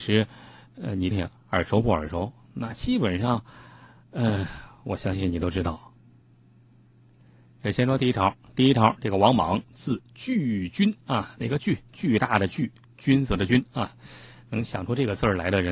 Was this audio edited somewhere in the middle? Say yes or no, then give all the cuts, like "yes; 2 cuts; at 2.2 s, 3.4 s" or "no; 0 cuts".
yes; 1 cut; at 1.1 s